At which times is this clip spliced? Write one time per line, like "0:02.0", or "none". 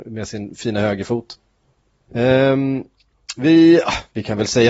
0:02.1